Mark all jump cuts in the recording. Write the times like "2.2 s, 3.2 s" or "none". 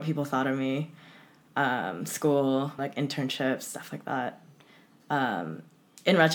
2.8 s, 5.0 s